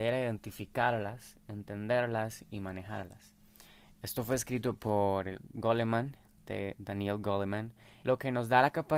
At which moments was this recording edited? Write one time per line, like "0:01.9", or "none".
0:08.0